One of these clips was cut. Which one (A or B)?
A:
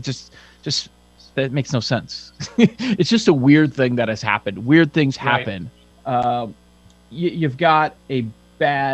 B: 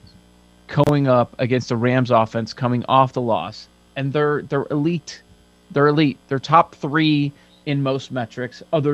A